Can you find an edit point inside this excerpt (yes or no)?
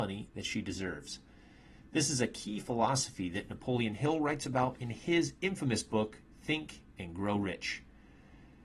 no